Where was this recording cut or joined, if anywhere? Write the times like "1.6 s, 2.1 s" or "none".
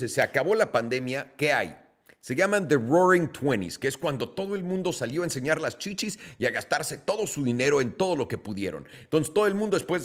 none